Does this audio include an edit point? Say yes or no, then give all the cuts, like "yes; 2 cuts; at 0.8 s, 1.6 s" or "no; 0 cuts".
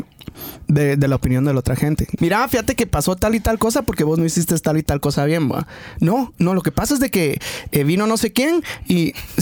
yes; 1 cut; at 2.2 s